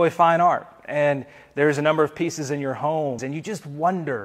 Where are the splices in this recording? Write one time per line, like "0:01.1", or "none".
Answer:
0:03.2